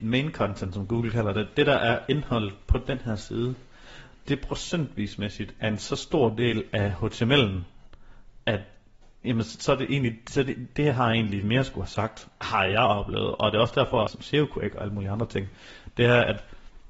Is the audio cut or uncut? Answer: cut